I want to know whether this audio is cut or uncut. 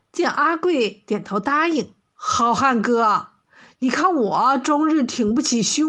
cut